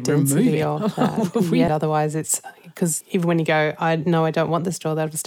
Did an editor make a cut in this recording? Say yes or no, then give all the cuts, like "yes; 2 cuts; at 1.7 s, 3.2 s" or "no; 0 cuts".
yes; 2 cuts; at 1.7 s, 3.0 s